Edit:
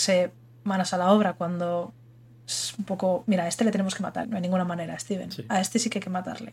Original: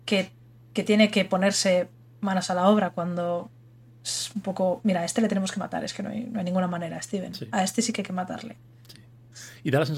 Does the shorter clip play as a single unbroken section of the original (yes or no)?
no